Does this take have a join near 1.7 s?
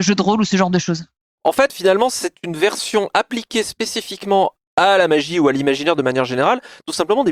yes; 1 cut; at 1.7 s

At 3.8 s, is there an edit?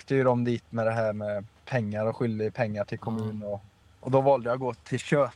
yes; 1 cut; at 3.8 s

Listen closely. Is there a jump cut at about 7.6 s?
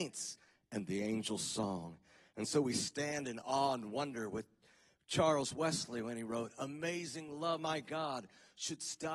yes; 1 cut; at 7.6 s

